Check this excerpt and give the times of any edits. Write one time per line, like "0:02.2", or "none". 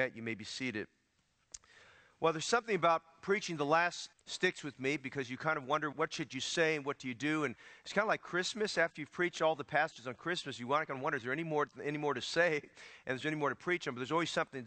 0:04.1
0:05.9